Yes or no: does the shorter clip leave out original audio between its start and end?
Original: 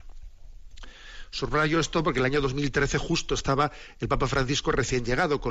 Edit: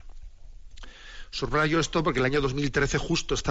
no